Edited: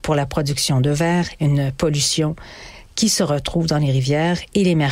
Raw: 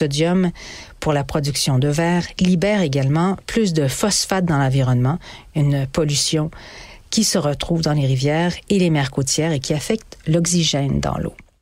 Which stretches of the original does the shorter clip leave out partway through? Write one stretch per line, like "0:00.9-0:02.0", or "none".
0:02.3-0:05.5